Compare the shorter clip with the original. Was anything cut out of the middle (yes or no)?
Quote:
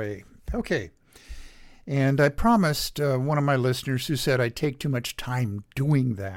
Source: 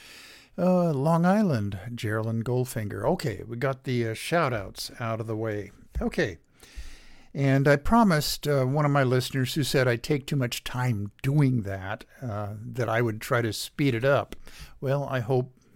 no